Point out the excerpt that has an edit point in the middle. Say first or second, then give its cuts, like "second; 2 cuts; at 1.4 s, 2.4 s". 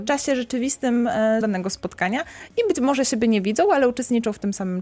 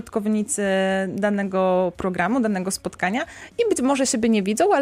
first; 1 cut; at 1.4 s